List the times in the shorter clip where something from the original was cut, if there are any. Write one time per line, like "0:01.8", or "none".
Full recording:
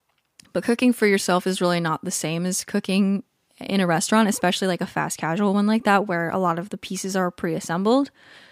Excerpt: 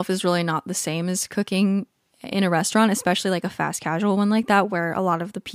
none